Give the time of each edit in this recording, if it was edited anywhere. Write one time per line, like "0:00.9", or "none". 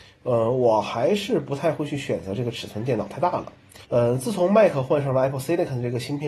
0:03.8